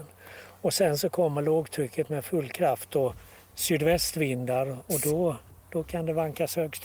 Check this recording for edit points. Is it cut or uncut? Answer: uncut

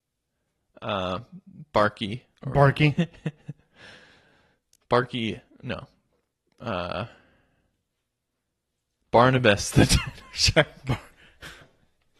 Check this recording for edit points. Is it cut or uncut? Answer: uncut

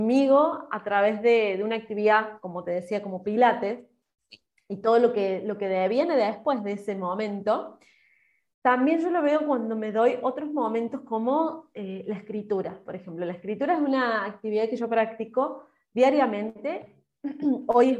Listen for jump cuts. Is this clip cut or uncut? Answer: uncut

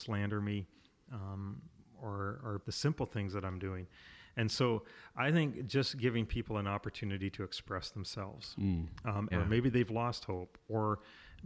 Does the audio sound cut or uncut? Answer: cut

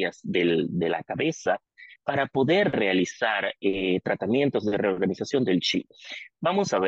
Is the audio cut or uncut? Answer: uncut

